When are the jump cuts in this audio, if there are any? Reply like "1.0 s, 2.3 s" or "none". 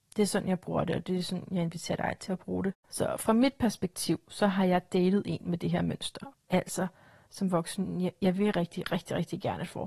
6.3 s